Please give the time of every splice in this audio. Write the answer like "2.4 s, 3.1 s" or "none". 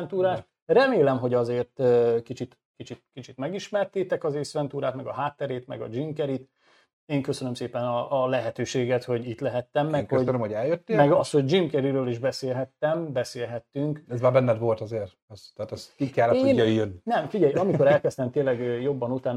none